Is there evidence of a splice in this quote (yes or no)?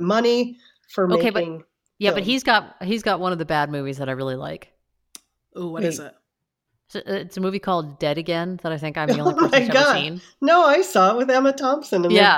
no